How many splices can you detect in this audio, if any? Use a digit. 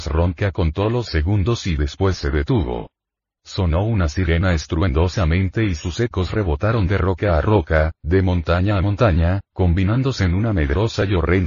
1